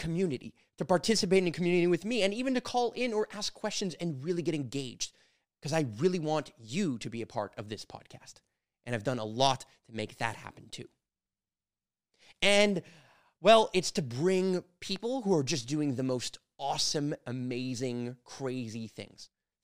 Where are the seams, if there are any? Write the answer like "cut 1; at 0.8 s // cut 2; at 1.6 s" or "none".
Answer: none